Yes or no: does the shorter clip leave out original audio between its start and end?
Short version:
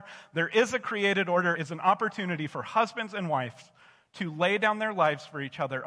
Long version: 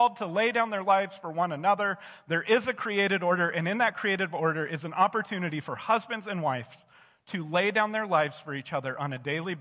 yes